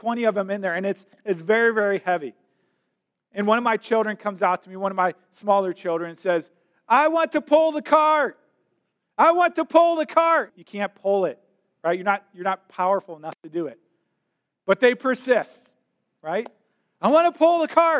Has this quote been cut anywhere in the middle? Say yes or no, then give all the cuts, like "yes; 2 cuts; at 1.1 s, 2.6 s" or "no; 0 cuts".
yes; 1 cut; at 10.5 s